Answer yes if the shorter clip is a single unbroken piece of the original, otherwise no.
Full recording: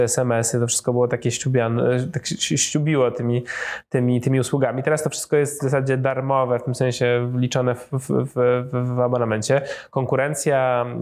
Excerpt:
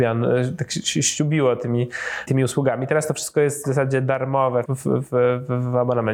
no